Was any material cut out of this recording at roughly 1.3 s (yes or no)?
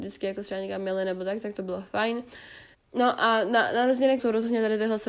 no